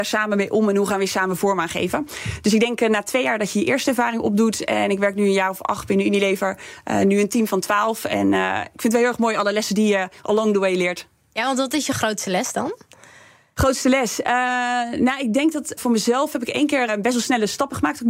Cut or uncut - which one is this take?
cut